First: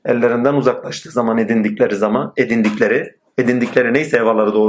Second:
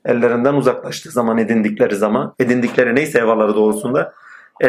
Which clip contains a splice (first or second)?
second